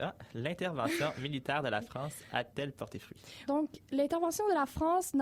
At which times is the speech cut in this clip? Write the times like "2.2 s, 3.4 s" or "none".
3.5 s